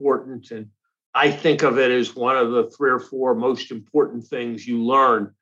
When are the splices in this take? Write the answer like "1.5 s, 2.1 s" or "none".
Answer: none